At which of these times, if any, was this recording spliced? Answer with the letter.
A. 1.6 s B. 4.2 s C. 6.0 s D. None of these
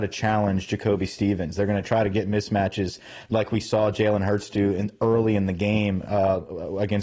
D